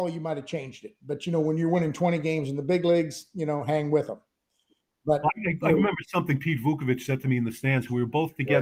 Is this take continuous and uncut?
yes; 0 cuts

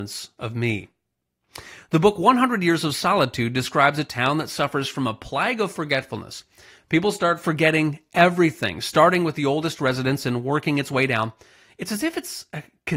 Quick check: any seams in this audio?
no; 0 cuts

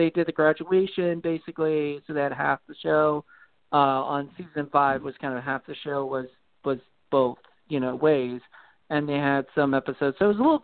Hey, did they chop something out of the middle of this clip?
no; 0 cuts

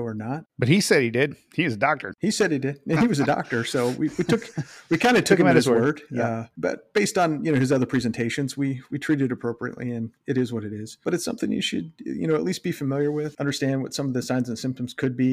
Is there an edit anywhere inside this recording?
no; 0 cuts

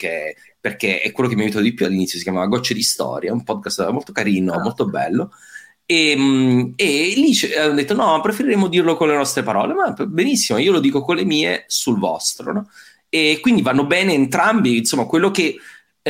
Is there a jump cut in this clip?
no; 0 cuts

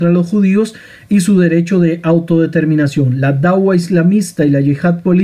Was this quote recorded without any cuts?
yes; 0 cuts

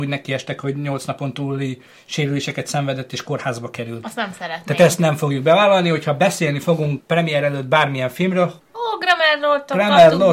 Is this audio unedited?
no; 2 cuts; at 7.0 s, 8.6 s

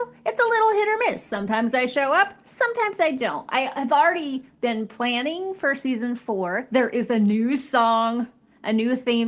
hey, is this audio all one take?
yes; 0 cuts

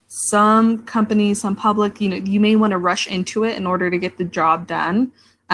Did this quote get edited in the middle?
no; 0 cuts

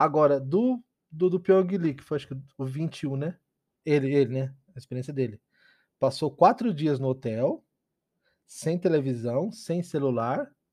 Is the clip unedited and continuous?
no; 1 cut; at 3.8 s

